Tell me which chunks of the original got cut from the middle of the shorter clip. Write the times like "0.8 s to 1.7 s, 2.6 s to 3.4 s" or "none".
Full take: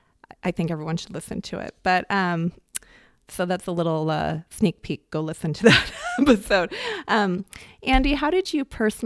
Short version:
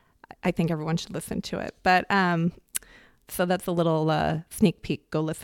none